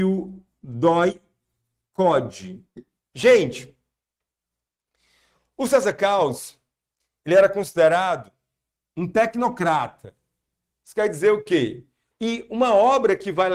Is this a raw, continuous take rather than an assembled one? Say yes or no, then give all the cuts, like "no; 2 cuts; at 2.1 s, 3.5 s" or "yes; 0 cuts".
no; 2 cuts; at 3.0 s, 12.1 s